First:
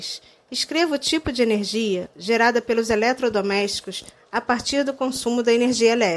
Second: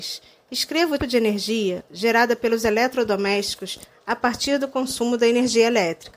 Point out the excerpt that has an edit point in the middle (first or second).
second